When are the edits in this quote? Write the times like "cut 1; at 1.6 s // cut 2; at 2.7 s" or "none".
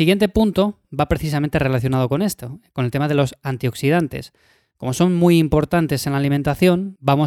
none